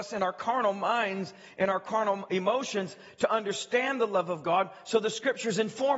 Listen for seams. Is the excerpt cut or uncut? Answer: uncut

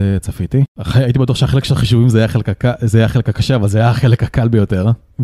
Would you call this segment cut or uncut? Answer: uncut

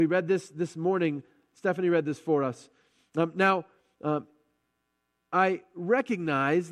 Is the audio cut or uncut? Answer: uncut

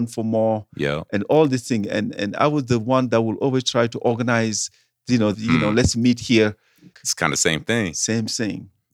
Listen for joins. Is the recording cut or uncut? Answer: cut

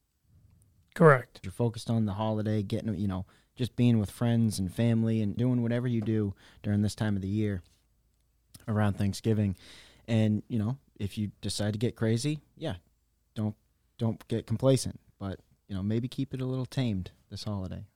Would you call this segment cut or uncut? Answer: cut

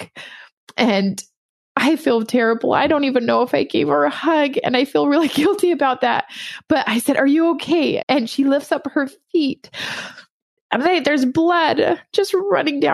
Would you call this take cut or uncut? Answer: cut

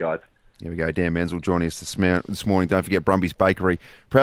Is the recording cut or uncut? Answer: uncut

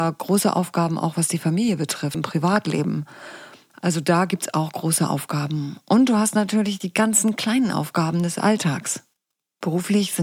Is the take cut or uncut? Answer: cut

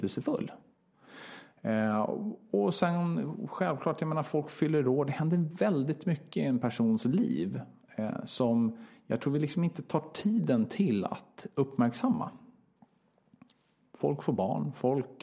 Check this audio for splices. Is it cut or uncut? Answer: uncut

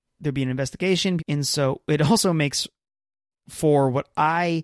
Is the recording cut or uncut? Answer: cut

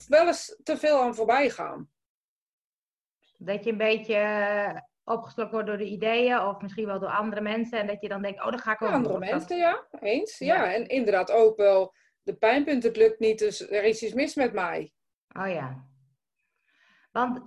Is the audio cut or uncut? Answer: uncut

